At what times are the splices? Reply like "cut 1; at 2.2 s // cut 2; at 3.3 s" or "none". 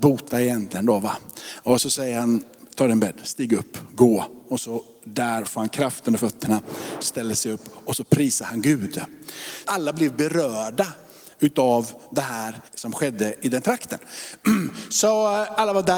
cut 1; at 9.6 s // cut 2; at 12.7 s